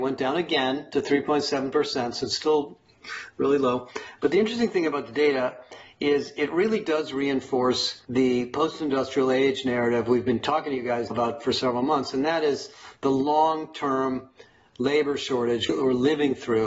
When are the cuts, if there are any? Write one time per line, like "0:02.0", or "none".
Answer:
0:11.1